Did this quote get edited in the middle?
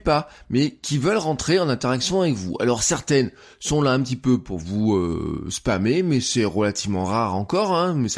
no; 0 cuts

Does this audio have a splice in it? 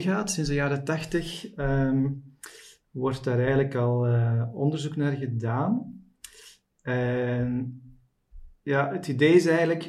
no; 0 cuts

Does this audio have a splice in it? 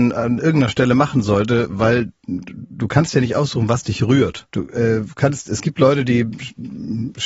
yes; 1 cut; at 4.5 s

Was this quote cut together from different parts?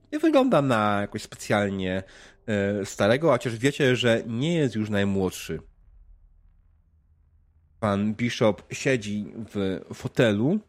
no; 0 cuts

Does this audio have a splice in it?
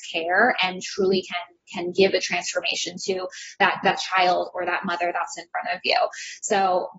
no; 0 cuts

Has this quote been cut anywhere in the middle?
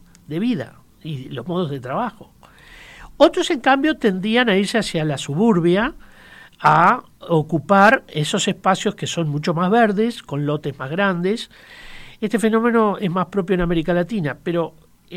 no; 0 cuts

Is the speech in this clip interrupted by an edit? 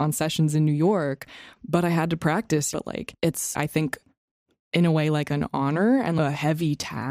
yes; 1 cut; at 2.7 s

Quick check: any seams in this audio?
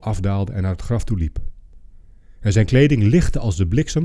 no; 0 cuts

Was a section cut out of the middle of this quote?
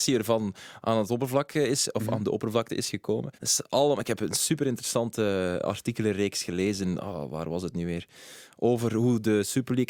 yes; 1 cut; at 3.3 s

